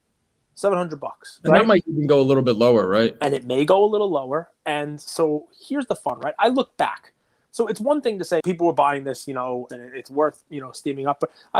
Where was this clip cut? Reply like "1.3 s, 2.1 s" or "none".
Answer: 8.4 s, 9.7 s